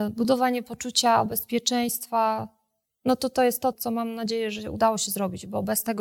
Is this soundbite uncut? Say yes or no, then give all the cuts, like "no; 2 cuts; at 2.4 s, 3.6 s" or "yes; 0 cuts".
no; 1 cut; at 3.7 s